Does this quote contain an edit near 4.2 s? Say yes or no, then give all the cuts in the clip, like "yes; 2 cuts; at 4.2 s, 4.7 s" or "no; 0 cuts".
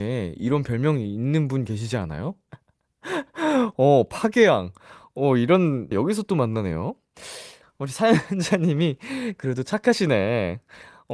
no; 3 cuts; at 2.5 s, 5.9 s, 7.6 s